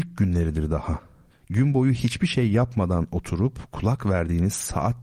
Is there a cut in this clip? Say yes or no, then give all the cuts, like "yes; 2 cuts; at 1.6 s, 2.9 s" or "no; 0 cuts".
yes; 1 cut; at 1.3 s